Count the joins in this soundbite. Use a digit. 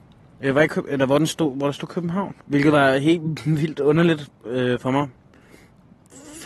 1